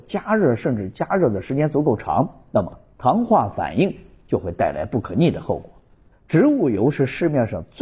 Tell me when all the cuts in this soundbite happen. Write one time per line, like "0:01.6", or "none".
0:06.1